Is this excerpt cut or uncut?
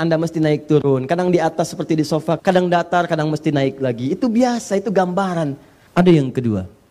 cut